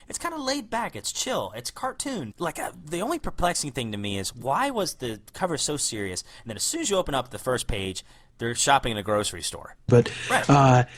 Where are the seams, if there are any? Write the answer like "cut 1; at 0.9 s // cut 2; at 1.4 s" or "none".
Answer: cut 1; at 2.3 s // cut 2; at 9.9 s